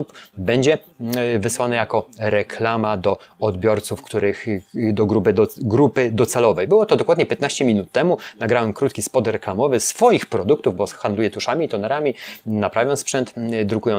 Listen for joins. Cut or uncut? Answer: uncut